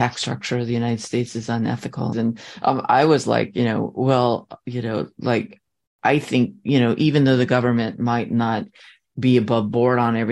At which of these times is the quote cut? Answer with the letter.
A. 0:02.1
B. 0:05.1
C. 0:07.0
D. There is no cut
A